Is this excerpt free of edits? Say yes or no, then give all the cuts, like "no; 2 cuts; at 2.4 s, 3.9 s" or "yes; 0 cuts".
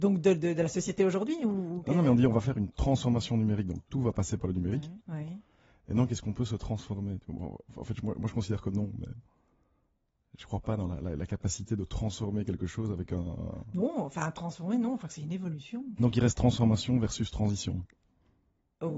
no; 2 cuts; at 5.0 s, 16.0 s